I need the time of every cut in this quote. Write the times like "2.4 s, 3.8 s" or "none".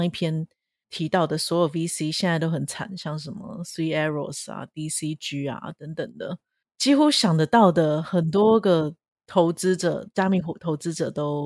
none